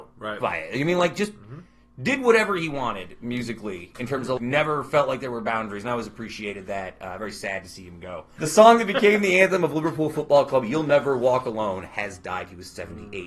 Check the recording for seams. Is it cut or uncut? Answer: cut